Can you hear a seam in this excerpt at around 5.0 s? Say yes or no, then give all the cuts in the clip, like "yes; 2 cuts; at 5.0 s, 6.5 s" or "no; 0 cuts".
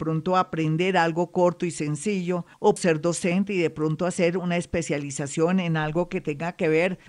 no; 1 cut; at 2.8 s